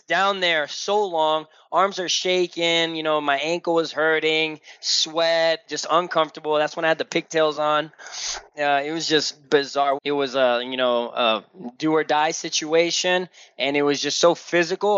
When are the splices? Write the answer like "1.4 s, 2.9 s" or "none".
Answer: 10.0 s